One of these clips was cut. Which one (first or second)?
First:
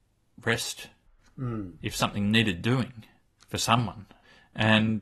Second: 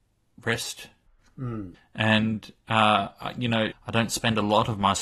second